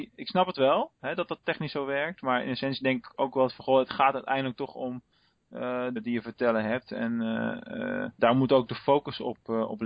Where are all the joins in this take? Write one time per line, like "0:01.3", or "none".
0:06.0
0:08.1